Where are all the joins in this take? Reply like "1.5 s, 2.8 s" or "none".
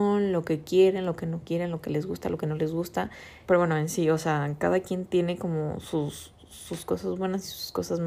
3.5 s